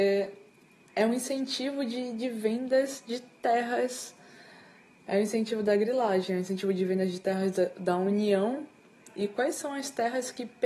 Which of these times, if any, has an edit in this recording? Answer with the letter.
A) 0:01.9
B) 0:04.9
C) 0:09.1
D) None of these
D